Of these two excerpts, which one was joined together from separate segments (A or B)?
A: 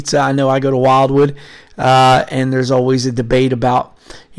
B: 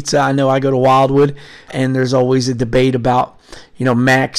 B